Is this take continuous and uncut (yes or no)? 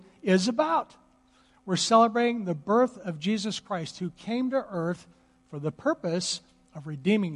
yes